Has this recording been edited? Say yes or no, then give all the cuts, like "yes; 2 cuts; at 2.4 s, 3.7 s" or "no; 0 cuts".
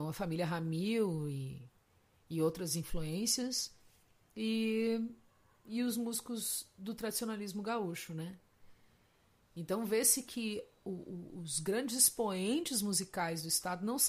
no; 0 cuts